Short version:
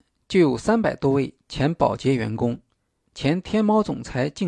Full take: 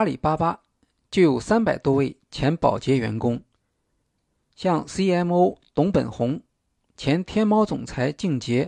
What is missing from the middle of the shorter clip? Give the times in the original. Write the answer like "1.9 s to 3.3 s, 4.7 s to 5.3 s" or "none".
3.9 s to 6.9 s

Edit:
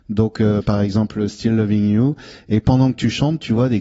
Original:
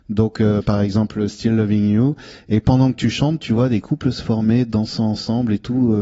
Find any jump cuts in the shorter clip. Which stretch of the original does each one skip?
none

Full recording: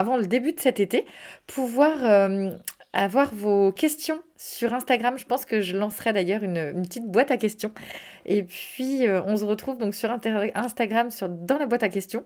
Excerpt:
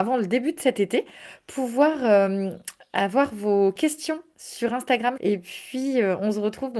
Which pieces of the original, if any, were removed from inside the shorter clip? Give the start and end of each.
5.2 s to 8.2 s

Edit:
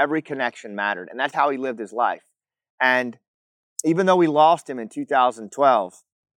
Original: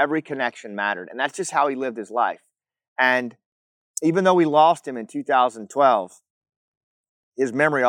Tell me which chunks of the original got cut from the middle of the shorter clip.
1.3 s to 1.5 s

